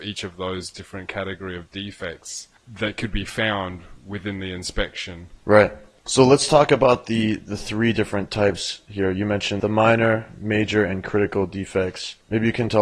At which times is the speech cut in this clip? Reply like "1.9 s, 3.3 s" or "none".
5.4 s